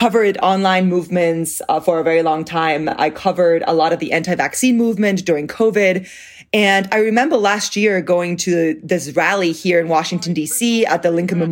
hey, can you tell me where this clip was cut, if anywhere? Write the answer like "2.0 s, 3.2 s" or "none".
none